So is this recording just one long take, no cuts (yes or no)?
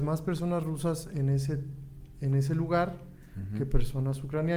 yes